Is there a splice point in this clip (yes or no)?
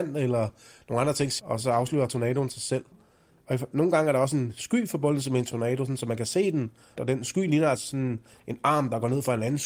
no